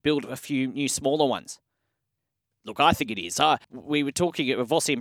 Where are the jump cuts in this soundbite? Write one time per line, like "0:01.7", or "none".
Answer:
0:02.5
0:03.6